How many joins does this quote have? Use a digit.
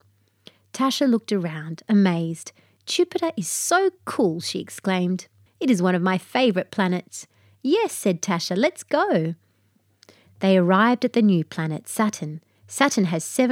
1